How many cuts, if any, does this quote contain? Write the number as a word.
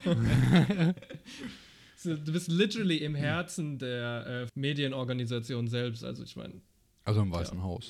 one